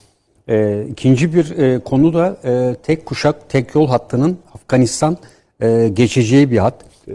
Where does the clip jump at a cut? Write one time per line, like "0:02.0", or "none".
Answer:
none